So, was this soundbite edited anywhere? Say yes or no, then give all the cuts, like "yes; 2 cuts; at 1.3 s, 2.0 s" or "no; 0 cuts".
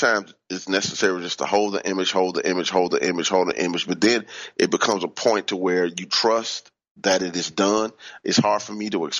no; 0 cuts